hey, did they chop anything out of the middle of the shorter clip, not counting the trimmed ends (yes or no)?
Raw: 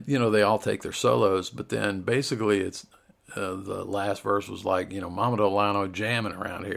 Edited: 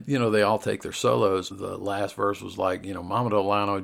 yes